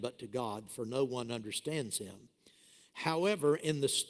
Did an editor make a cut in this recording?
no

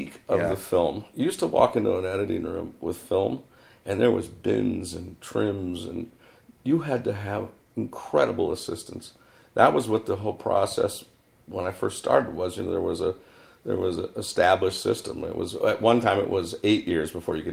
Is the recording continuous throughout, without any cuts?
yes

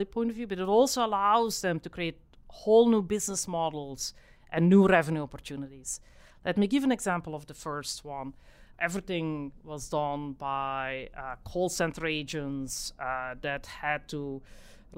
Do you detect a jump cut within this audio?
yes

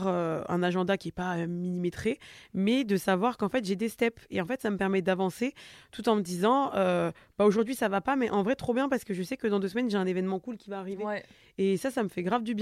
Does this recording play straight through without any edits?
yes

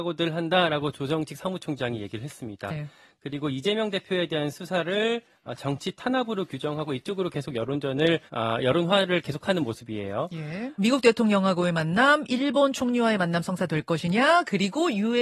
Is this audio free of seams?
no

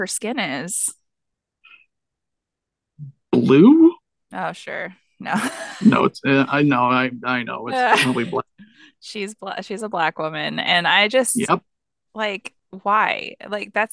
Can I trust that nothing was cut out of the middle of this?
yes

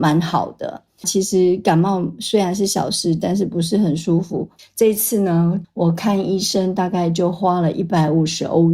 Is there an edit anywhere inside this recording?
yes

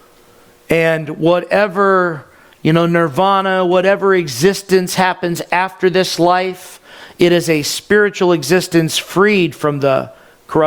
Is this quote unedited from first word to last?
yes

